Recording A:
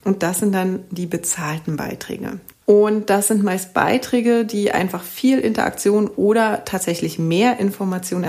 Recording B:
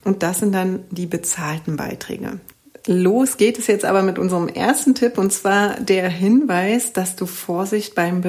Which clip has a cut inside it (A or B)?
A